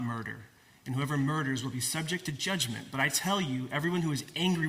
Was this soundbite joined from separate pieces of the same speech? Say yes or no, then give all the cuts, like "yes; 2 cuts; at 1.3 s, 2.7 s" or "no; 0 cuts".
no; 0 cuts